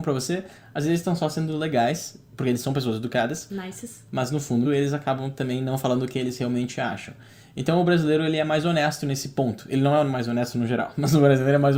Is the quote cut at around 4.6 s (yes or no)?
yes